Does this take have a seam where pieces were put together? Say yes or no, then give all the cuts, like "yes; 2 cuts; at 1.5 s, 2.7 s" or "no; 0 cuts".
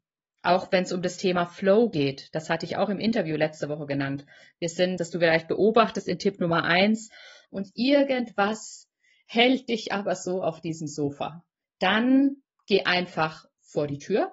yes; 2 cuts; at 5.0 s, 7.4 s